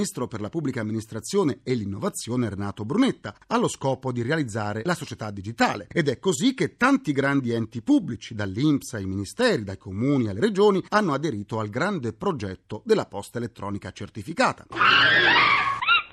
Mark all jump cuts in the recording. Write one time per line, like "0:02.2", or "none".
0:14.7